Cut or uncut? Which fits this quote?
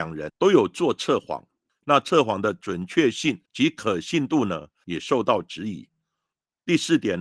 uncut